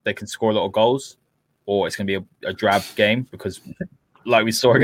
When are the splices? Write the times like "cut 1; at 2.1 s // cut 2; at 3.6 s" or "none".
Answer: none